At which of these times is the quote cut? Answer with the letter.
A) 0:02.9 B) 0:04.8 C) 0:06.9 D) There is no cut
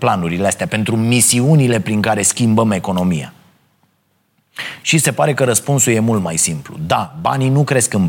D